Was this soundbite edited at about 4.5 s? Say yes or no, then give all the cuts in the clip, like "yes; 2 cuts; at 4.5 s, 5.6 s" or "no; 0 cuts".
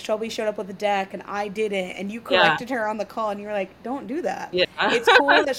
yes; 1 cut; at 4.5 s